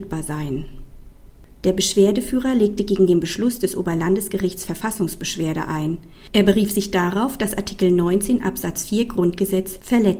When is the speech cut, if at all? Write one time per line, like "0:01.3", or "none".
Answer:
none